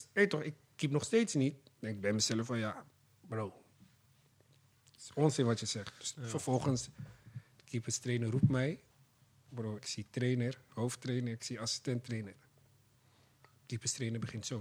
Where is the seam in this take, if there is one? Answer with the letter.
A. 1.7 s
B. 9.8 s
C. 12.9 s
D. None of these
B